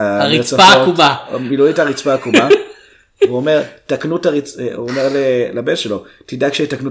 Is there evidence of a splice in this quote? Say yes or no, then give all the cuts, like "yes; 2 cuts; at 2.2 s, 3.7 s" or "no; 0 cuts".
no; 0 cuts